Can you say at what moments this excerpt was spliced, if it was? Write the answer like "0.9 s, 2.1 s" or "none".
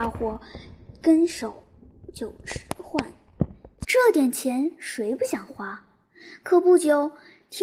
3.8 s